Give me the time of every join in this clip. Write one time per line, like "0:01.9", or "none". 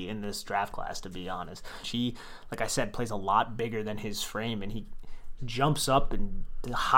0:01.8
0:05.4